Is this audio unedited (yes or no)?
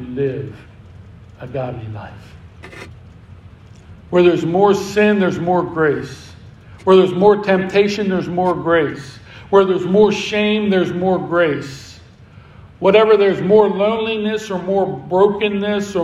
yes